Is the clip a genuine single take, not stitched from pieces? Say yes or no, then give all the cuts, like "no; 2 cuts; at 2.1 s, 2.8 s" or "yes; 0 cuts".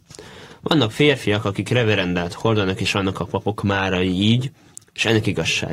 yes; 0 cuts